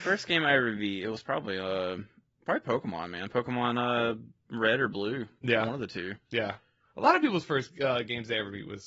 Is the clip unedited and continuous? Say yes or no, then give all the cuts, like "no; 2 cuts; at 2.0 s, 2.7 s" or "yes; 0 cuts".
yes; 0 cuts